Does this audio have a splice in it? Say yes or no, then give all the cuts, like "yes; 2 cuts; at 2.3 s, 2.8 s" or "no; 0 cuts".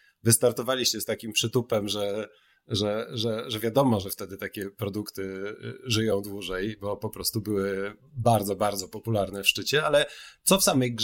no; 0 cuts